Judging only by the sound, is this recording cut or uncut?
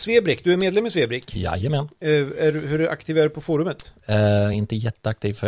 uncut